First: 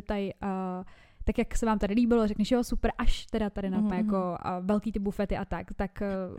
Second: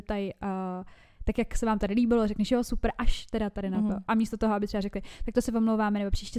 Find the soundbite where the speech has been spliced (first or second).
first